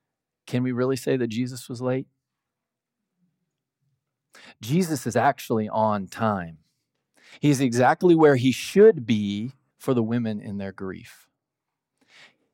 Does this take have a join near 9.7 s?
yes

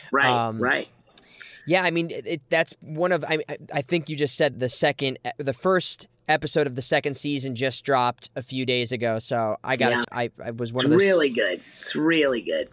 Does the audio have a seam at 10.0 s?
yes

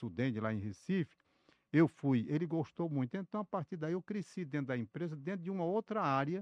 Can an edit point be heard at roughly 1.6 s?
no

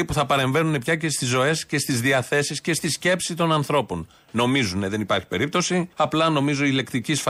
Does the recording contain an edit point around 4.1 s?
no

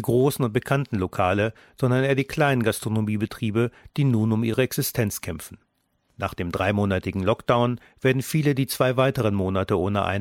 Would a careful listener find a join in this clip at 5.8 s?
no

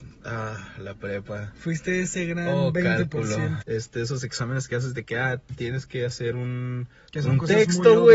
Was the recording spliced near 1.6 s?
no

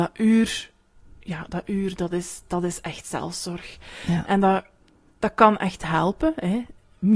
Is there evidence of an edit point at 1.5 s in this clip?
no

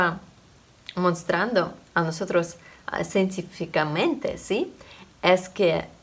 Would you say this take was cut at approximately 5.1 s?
no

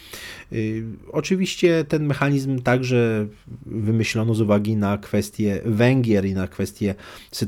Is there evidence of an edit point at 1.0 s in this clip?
no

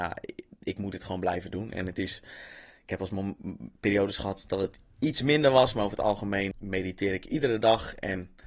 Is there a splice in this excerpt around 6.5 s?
yes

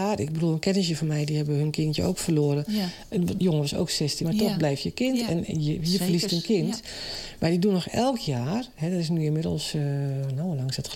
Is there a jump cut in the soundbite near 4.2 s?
yes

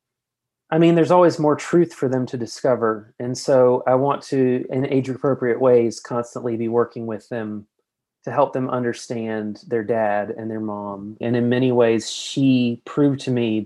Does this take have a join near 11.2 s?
yes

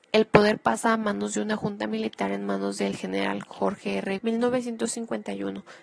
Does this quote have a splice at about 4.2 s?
yes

